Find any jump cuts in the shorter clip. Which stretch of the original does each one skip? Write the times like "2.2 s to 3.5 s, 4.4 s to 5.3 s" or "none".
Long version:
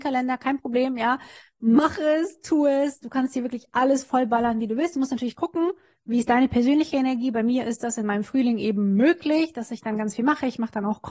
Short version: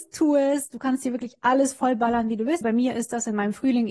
4.9 s to 7.3 s